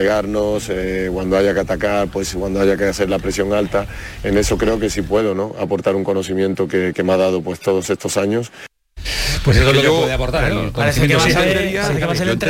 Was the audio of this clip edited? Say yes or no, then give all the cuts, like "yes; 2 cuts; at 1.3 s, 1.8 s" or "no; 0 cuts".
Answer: no; 0 cuts